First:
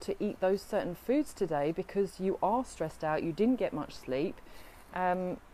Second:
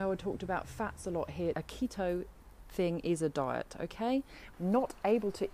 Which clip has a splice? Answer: second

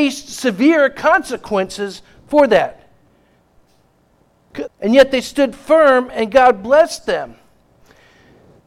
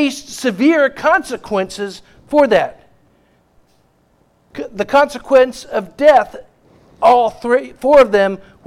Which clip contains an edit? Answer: first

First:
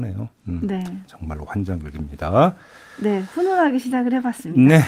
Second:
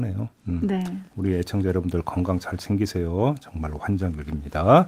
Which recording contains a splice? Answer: first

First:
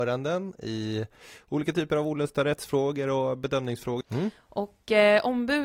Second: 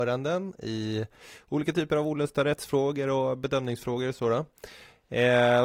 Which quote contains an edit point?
first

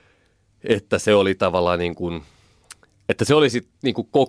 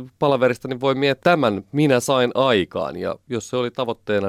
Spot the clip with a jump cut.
second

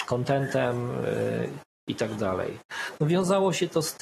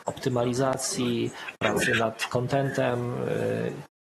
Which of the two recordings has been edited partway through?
first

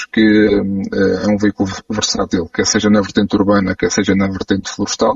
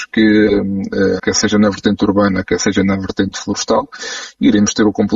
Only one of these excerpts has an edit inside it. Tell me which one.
second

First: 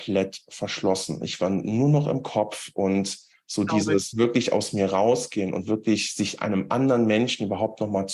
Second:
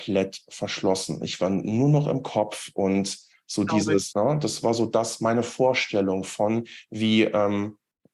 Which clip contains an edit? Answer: second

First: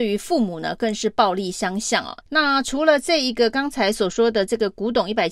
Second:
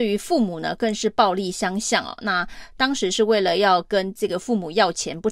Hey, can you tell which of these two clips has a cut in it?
first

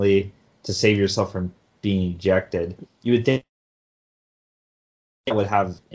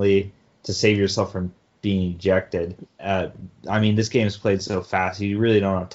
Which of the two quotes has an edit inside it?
second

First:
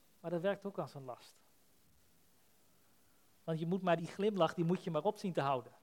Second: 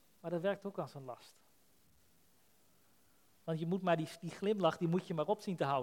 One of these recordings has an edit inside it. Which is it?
first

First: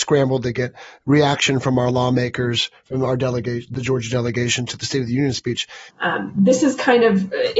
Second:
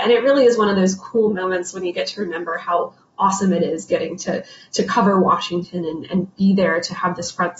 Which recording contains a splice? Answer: first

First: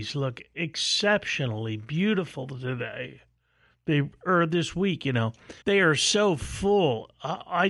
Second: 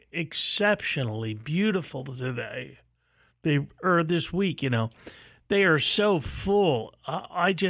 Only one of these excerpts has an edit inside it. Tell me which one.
first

